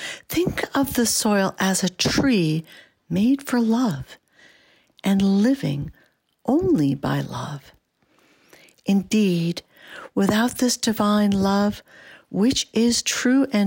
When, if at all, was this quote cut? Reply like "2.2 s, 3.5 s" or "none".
none